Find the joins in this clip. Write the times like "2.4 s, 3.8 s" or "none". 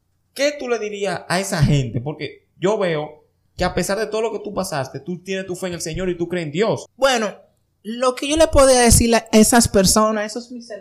6.9 s